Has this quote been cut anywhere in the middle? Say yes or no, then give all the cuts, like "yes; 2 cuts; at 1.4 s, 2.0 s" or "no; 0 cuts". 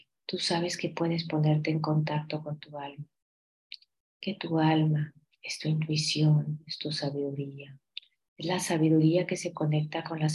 no; 0 cuts